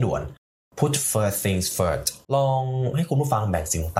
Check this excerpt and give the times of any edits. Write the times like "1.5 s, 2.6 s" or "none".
2.2 s